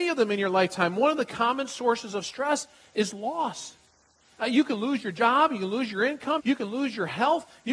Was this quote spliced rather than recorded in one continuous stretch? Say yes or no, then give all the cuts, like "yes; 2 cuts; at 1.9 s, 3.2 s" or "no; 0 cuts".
yes; 1 cut; at 6.4 s